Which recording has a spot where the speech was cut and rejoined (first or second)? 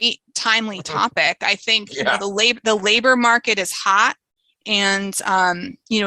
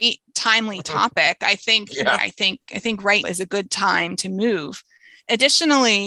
second